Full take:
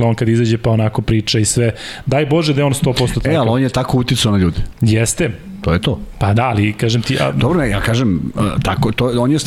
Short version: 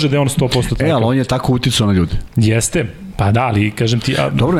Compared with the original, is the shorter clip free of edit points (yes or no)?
no